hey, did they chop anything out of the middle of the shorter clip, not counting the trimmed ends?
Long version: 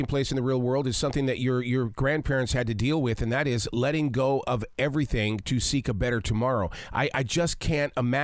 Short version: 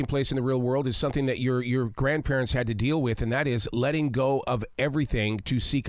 no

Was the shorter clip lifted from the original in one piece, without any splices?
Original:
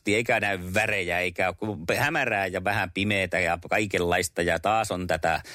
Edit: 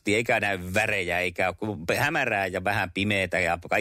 yes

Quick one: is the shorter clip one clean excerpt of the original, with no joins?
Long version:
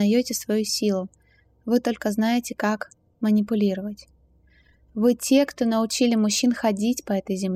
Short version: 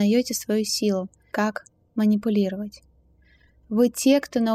no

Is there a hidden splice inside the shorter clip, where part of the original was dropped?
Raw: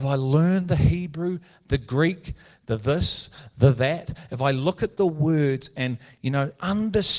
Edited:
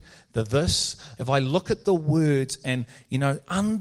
yes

